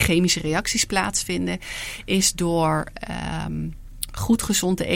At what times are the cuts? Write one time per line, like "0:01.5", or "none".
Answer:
none